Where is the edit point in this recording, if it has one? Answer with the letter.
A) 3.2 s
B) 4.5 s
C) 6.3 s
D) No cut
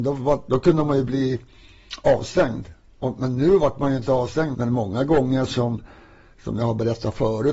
B